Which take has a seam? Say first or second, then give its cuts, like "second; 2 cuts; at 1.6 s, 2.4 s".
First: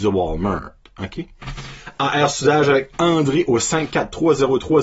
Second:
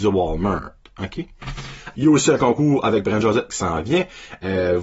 second; 1 cut; at 1.9 s